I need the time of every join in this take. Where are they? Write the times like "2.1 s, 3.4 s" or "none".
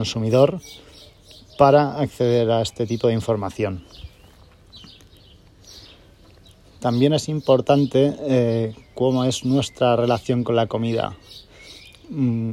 none